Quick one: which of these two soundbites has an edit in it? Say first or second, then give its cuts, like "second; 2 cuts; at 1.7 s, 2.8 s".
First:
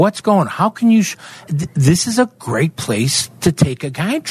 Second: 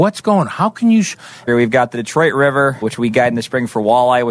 second; 2 cuts; at 1.5 s, 2.8 s